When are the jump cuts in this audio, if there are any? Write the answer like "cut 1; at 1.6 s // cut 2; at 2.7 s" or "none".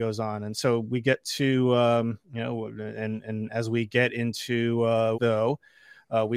cut 1; at 2.2 s // cut 2; at 5.1 s